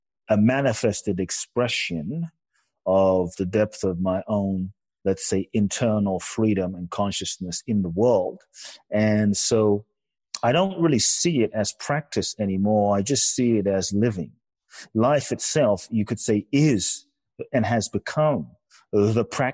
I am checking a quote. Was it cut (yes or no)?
no